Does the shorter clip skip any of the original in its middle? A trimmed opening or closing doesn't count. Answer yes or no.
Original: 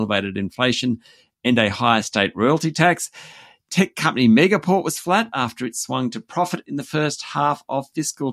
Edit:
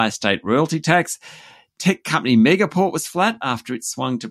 no